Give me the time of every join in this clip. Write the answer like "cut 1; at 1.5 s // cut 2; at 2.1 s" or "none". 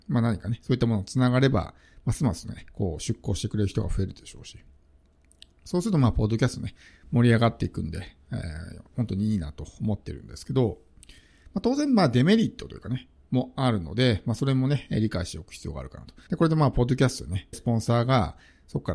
cut 1; at 16.3 s // cut 2; at 17.5 s